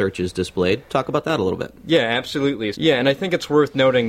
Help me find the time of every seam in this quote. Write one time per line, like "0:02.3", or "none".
0:02.7

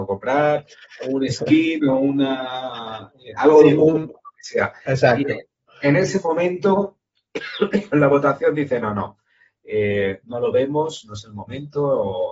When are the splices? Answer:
none

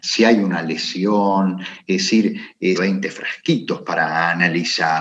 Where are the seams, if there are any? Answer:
0:02.7

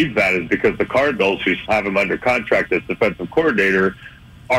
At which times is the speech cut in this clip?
0:01.7

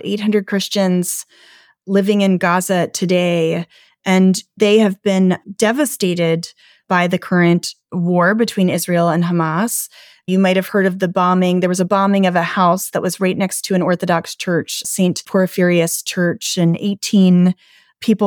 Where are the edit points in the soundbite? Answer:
0:14.8

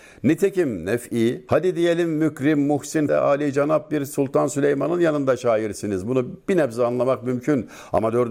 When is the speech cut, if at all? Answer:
0:03.1

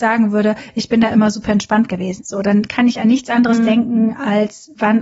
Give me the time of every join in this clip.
0:02.2

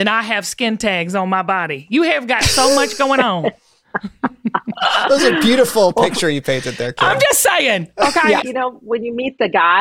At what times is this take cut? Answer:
0:08.4

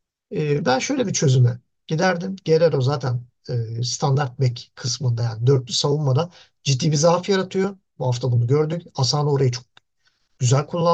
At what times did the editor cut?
none

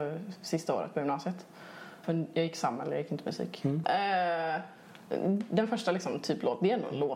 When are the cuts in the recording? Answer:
0:02.0
0:03.8

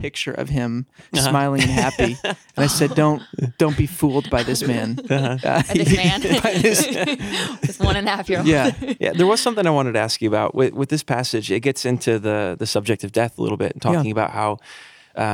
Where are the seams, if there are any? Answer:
0:09.0

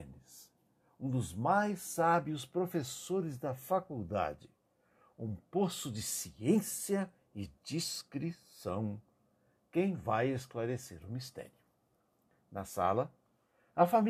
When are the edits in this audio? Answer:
none

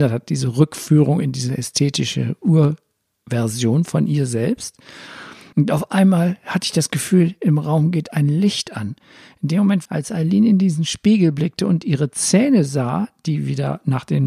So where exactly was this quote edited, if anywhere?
0:05.5
0:09.9

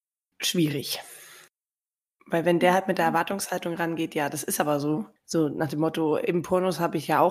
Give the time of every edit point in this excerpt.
0:05.2

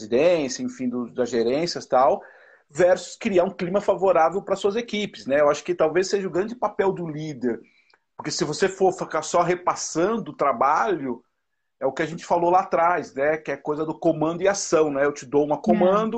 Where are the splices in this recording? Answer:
none

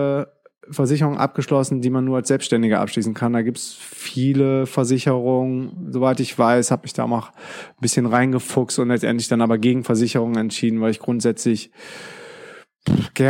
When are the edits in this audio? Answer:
none

